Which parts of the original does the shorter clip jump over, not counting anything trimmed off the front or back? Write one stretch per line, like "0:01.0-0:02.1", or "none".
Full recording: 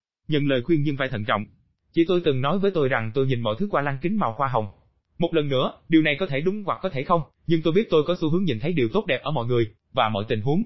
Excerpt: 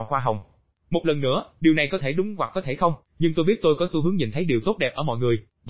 none